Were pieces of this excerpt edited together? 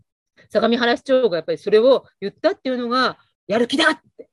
yes; 1 cut; at 3.3 s

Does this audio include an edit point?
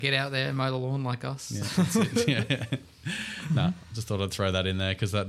no; 0 cuts

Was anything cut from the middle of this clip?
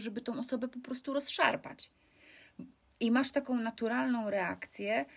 no; 0 cuts

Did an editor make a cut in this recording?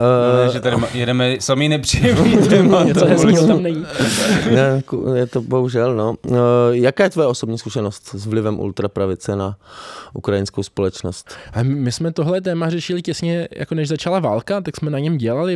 no; 0 cuts

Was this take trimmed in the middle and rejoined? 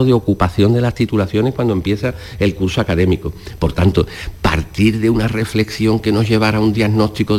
no; 0 cuts

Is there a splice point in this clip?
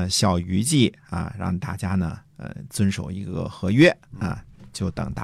no; 0 cuts

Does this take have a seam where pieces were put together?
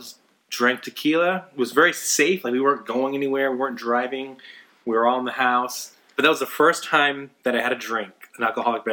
no; 0 cuts

